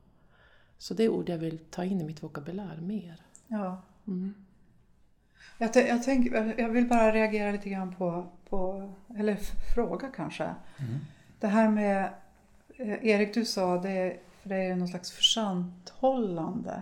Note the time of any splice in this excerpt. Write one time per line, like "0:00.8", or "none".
none